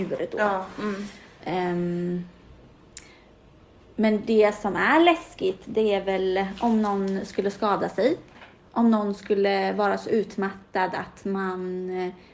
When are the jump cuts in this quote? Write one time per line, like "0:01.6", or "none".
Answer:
none